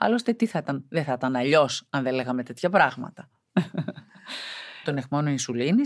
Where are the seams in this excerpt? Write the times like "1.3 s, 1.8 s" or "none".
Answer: 4.8 s